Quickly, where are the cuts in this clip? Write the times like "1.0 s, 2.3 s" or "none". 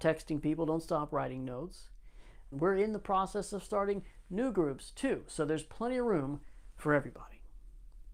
2.5 s